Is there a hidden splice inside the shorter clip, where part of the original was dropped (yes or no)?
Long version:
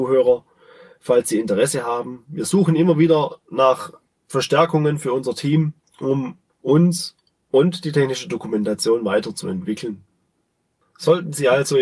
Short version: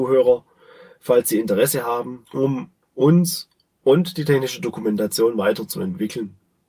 yes